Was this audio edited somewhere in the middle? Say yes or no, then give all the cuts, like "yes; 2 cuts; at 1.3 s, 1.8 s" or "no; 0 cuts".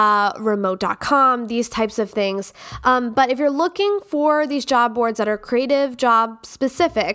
no; 0 cuts